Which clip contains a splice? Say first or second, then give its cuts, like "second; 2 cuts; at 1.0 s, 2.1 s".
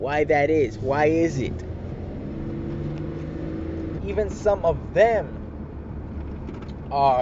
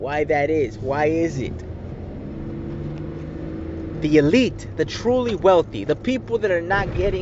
first; 1 cut; at 4.0 s